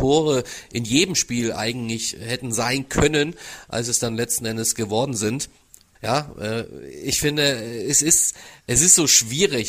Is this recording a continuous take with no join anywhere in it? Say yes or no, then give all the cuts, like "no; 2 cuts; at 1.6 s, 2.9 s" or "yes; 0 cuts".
no; 1 cut; at 5.9 s